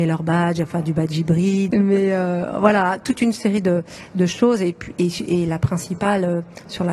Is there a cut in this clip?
yes; 1 cut; at 1.7 s

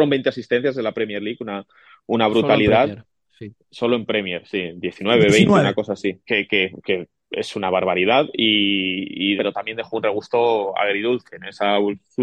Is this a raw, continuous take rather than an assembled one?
no; 2 cuts; at 6.3 s, 9.4 s

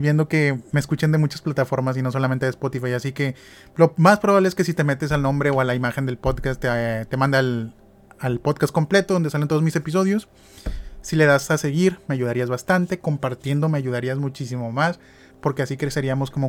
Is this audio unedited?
yes; 0 cuts

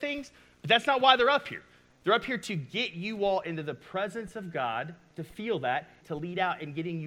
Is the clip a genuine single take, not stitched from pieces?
no; 1 cut; at 6.0 s

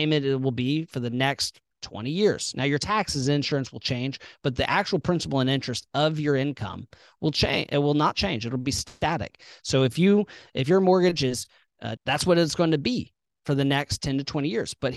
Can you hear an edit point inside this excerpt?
yes; 1 cut; at 12.0 s

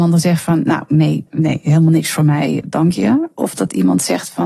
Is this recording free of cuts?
no; 2 cuts; at 1.3 s, 2.6 s

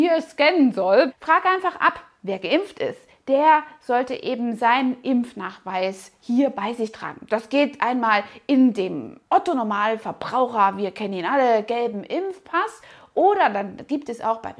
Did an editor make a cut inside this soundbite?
yes; 1 cut; at 1.1 s

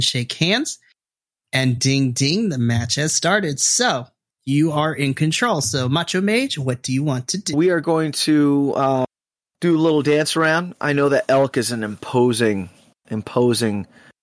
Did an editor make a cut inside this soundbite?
no; 0 cuts

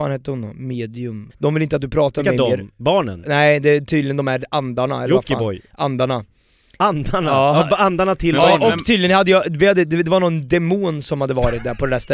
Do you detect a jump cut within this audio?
yes; 1 cut; at 1.3 s

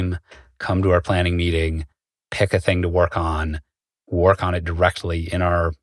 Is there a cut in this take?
no; 0 cuts

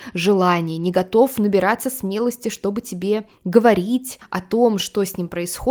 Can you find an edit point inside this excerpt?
no; 0 cuts

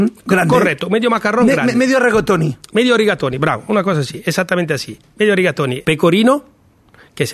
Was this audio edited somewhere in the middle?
yes; 1 cut; at 5.8 s

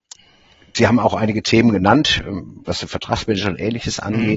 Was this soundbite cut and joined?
yes; 1 cut; at 2.7 s

